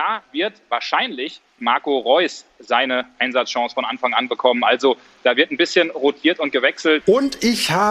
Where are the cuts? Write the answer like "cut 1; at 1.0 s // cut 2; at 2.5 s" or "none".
cut 1; at 1.6 s // cut 2; at 7.0 s